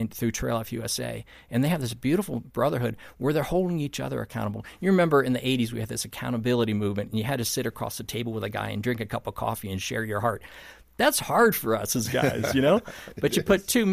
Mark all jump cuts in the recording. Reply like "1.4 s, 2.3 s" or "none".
none